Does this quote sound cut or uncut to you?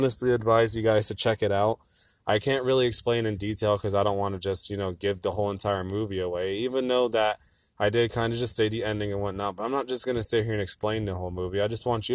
uncut